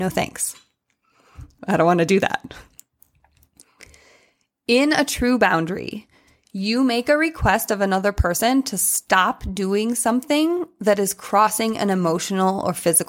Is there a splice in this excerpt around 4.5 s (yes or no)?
no